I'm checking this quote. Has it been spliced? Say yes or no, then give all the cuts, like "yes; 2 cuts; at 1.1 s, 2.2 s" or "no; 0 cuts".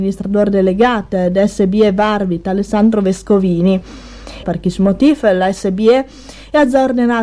yes; 1 cut; at 4.4 s